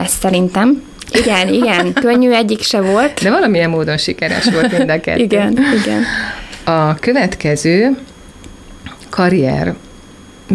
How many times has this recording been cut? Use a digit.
1